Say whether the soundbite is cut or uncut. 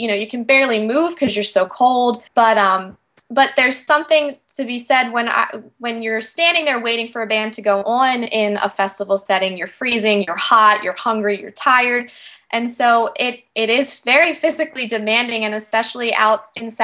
cut